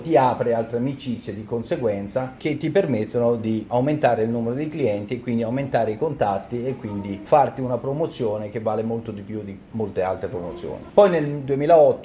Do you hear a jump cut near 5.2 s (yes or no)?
no